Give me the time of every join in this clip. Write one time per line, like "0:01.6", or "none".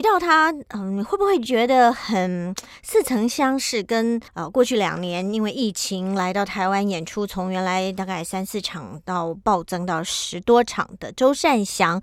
0:04.3